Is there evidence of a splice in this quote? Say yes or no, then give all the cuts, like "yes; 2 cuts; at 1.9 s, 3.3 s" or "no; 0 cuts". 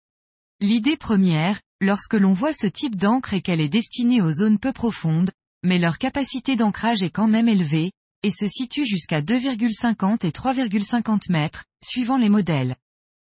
no; 0 cuts